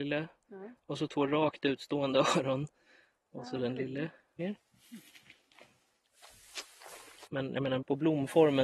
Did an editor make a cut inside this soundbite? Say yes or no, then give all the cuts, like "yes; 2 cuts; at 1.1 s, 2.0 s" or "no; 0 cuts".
yes; 2 cuts; at 4.4 s, 7.3 s